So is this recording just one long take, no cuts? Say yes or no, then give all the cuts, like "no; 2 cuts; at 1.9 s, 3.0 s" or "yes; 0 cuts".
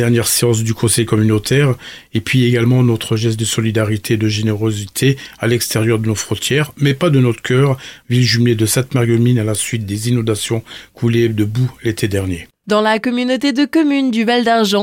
no; 1 cut; at 8.0 s